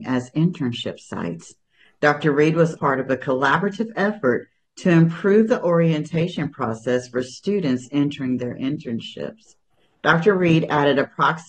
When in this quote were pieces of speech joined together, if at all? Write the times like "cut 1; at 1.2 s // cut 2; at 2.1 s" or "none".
cut 1; at 2.8 s